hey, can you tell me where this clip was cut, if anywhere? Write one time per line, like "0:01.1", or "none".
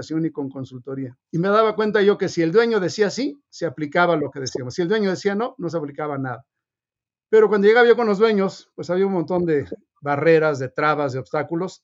0:01.2